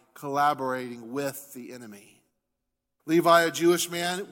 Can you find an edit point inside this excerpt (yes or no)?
yes